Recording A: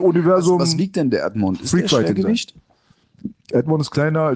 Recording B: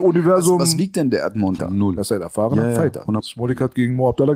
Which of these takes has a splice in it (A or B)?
B